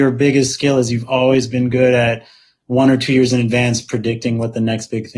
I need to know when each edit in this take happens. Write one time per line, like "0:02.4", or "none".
none